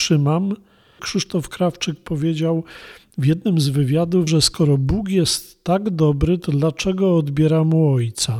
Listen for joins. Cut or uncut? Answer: cut